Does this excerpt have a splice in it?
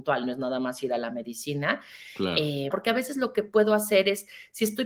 yes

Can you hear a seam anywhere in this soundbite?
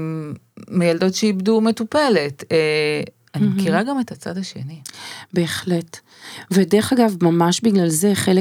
no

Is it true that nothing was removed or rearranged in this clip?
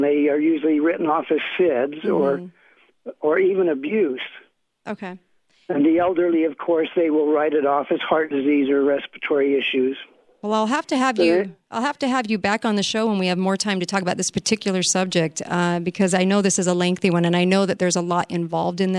yes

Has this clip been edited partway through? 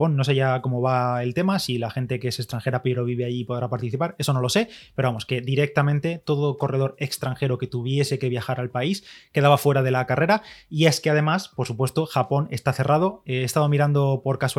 no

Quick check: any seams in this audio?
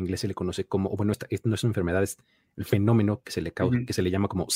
no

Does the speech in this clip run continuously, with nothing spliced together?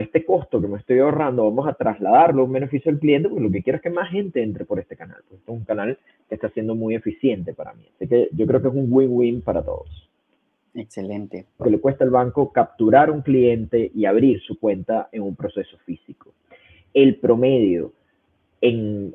no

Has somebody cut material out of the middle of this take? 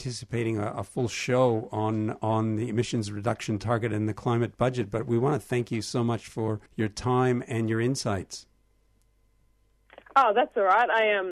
yes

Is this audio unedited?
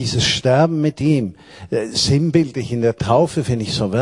yes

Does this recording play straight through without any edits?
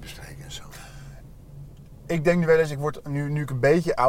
no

